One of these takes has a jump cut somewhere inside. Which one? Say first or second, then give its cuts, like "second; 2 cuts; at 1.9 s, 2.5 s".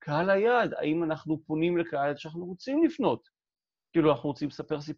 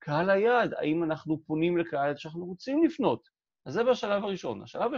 second; 1 cut; at 3.5 s